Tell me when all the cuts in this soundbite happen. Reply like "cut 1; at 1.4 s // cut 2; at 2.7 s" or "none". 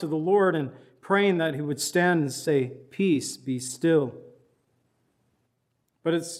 none